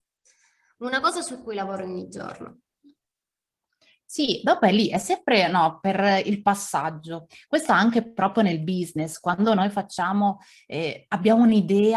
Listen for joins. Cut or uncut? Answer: uncut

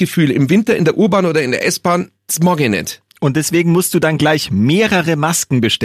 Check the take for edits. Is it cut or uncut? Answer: uncut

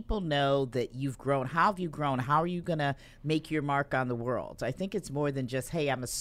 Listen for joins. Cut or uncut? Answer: uncut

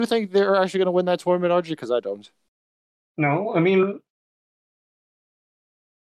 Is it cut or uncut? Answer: uncut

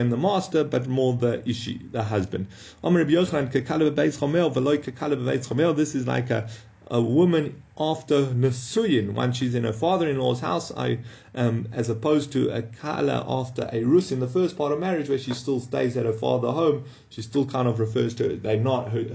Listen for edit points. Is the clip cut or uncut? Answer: uncut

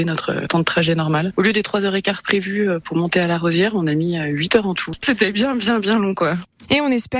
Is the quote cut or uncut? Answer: uncut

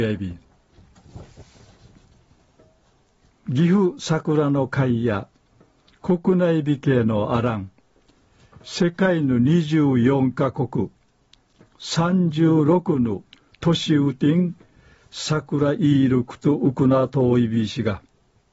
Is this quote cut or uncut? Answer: uncut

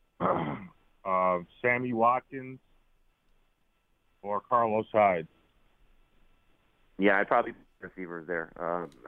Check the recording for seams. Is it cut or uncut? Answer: uncut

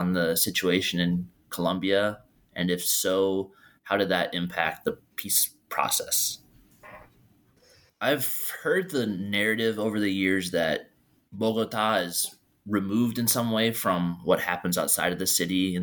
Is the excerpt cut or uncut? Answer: cut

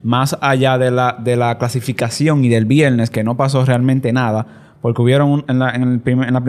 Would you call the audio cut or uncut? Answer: uncut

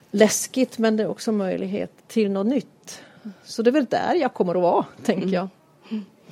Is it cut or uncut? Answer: cut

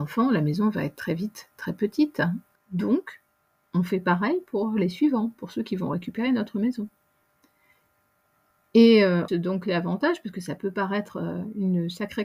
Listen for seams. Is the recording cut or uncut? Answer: cut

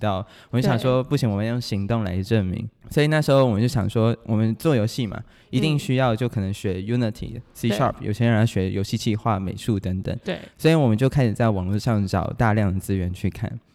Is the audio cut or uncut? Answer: cut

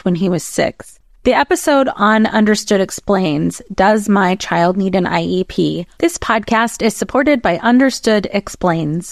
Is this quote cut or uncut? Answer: cut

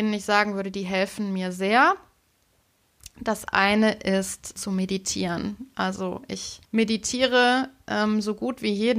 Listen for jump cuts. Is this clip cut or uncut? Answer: cut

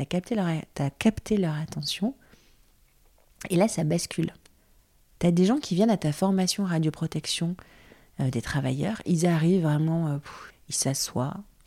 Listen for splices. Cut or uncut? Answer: cut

